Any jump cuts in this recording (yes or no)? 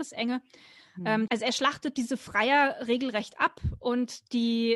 yes